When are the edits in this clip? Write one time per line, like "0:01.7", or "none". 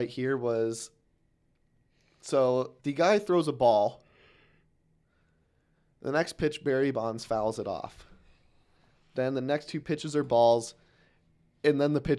0:02.8